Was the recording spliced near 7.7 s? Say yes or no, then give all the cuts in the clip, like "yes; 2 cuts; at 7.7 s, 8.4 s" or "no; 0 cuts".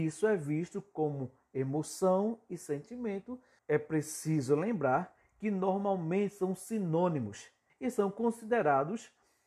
yes; 2 cuts; at 3.6 s, 7.7 s